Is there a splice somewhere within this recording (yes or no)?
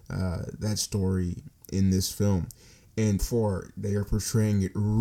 yes